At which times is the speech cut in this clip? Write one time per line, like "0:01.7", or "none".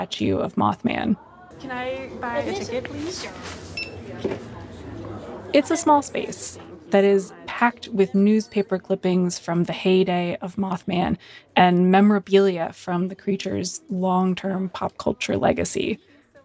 0:01.5